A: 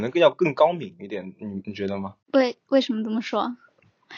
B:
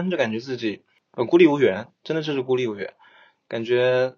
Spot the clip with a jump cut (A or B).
A